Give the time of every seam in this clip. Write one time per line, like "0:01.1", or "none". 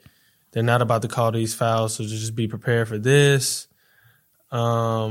none